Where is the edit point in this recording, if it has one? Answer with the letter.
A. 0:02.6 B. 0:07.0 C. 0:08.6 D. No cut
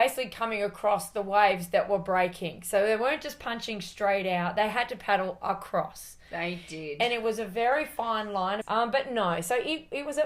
C